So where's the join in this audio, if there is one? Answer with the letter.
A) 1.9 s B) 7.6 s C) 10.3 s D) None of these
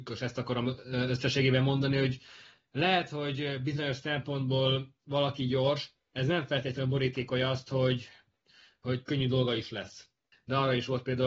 C